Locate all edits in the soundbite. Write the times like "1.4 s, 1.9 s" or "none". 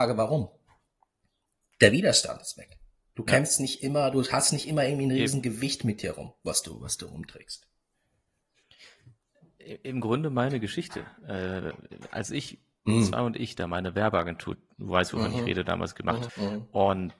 16.3 s